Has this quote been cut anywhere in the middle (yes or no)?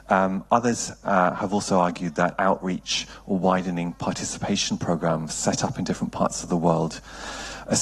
no